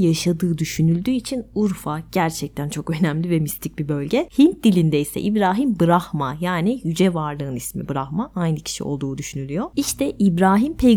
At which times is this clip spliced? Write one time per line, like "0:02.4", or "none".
0:04.3

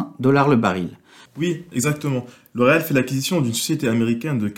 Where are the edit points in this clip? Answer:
0:01.3

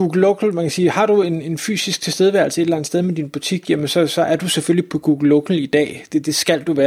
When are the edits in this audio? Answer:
none

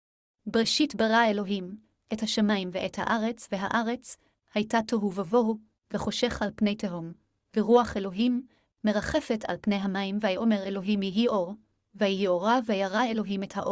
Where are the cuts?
none

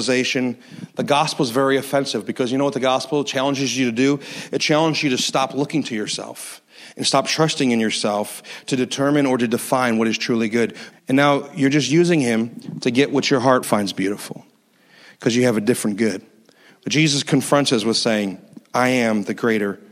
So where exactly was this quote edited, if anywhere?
0:10.9
0:13.6

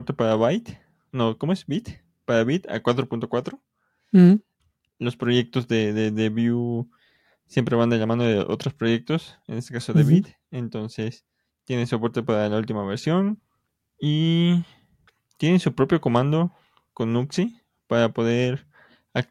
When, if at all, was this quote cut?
none

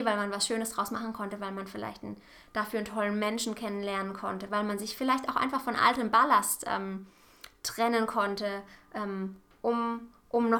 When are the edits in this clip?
0:04.5

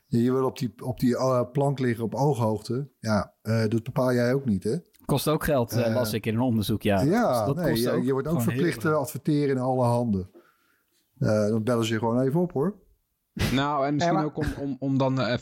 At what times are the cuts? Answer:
0:04.9

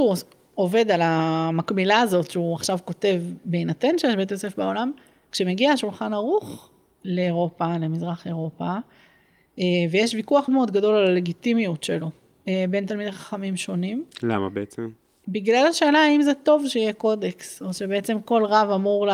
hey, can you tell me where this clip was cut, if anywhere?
0:10.5

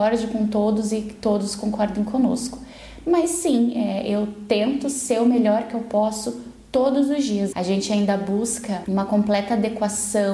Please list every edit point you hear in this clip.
0:07.5

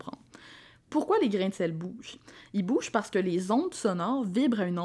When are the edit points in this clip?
none

